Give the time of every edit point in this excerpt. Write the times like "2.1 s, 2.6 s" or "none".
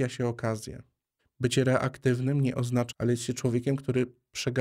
1.2 s, 2.9 s